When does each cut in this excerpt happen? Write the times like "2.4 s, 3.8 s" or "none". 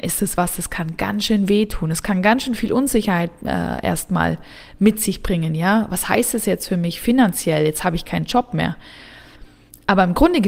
none